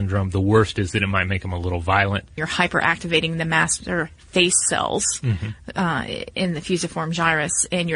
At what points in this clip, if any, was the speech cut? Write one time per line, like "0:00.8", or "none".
0:02.4